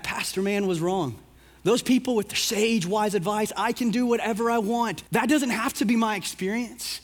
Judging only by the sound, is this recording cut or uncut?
cut